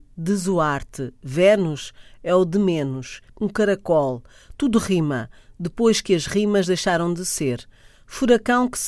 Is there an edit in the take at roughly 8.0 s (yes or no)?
no